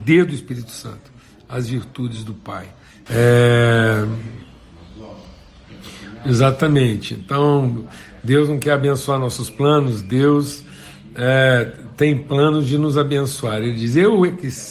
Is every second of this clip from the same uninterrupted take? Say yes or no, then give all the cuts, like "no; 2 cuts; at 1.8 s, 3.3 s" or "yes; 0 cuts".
no; 1 cut; at 3.1 s